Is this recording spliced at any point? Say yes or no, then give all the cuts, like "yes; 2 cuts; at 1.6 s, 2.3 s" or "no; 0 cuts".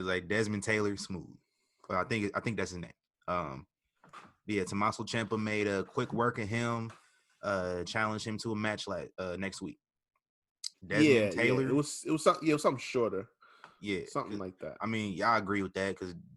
yes; 2 cuts; at 7.8 s, 10.7 s